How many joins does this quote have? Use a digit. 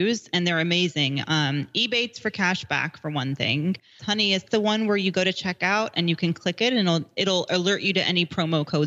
1